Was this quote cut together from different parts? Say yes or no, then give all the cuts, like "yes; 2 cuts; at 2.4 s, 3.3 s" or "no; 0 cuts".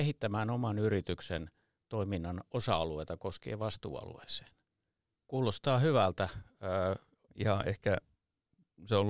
yes; 2 cuts; at 5.1 s, 7.3 s